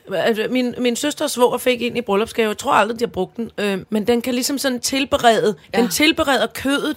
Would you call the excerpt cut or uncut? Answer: cut